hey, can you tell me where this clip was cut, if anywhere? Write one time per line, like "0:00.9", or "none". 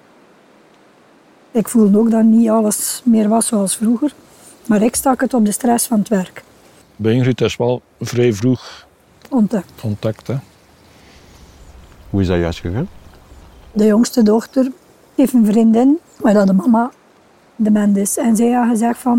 0:06.8